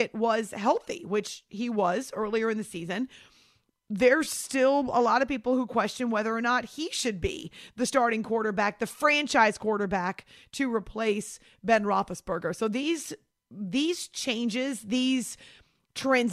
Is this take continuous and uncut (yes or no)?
yes